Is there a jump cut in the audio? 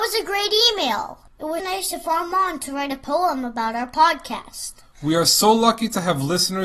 yes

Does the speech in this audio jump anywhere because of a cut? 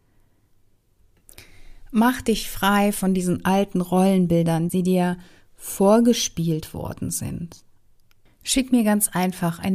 yes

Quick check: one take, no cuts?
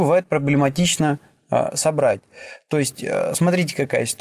yes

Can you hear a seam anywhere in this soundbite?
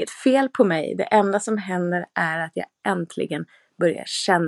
no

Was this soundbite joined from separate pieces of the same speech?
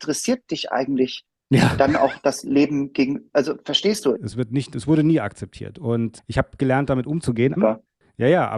yes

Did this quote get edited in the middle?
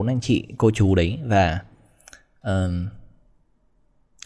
no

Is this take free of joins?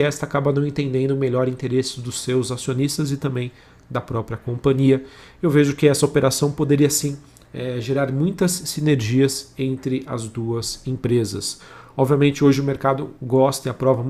yes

